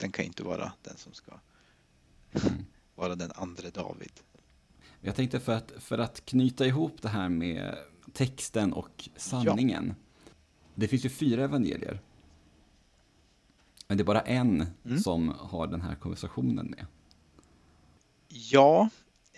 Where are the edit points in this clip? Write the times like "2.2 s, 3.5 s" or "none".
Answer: none

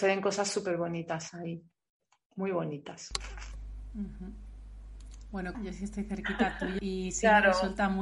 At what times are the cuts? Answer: 5.5 s, 6.8 s

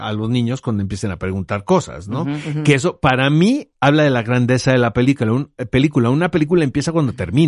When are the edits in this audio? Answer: 3.7 s

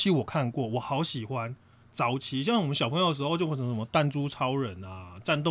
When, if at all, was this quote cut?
1.8 s

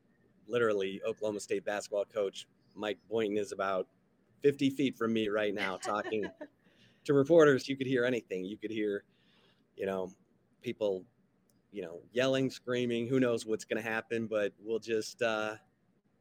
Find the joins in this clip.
7.6 s

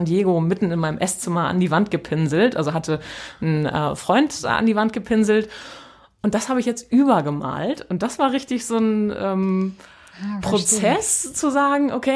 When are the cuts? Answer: none

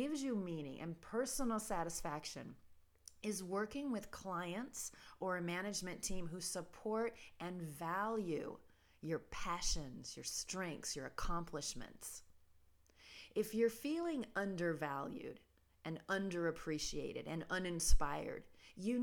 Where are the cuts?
none

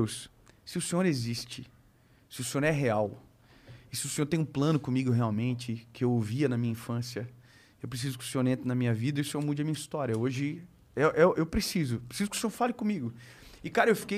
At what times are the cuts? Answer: none

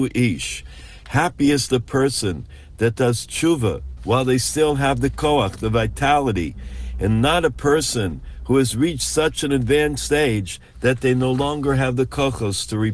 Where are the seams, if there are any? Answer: 4.0 s

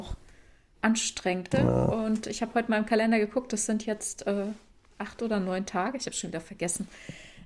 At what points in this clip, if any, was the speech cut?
1.5 s

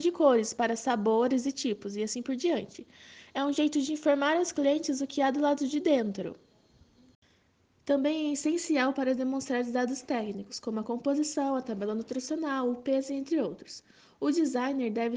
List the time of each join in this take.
none

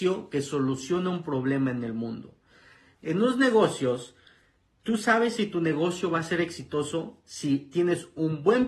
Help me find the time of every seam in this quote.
2.9 s

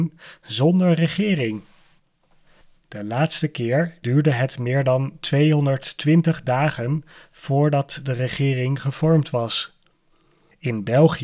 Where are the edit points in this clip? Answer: 2.8 s, 4.0 s

